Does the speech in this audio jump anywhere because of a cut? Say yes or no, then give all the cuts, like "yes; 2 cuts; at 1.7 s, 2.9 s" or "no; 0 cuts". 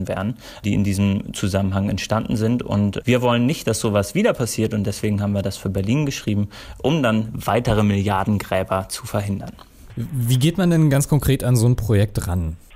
no; 0 cuts